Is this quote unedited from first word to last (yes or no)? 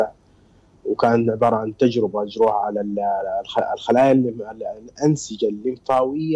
yes